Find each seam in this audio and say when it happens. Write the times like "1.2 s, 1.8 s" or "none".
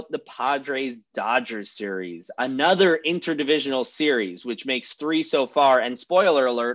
none